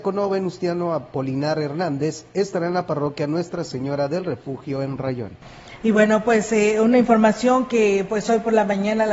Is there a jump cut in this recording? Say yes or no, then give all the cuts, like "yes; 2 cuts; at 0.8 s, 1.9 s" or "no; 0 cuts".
no; 0 cuts